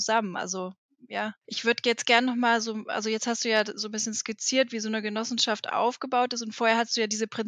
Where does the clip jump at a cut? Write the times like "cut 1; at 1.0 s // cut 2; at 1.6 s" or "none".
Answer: cut 1; at 1.4 s